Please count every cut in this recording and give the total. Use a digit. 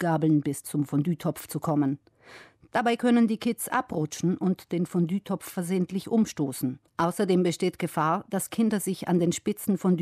1